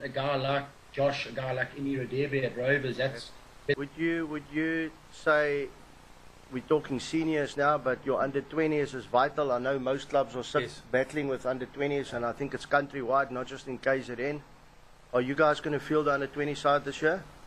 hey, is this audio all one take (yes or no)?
no